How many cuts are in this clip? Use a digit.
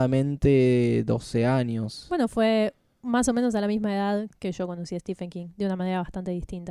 1